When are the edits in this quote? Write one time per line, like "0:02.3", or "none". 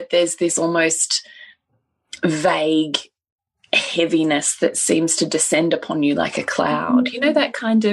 none